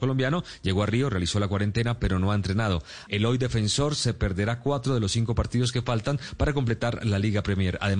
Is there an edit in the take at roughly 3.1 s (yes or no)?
yes